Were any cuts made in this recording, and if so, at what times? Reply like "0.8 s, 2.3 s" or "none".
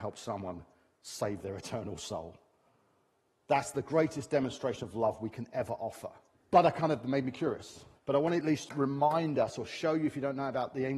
6.3 s, 7.9 s